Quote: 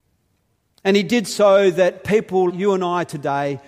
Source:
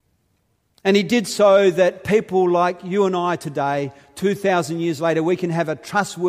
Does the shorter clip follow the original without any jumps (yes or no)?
no